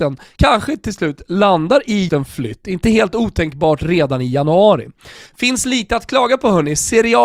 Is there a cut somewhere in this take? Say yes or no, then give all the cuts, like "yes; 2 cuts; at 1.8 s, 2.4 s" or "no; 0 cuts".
yes; 2 cuts; at 2.1 s, 5.3 s